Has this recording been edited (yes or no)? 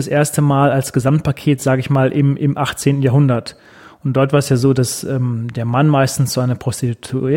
no